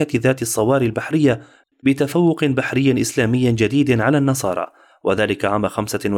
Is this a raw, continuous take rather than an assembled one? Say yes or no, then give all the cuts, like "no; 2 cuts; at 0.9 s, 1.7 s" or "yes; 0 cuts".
no; 1 cut; at 1.7 s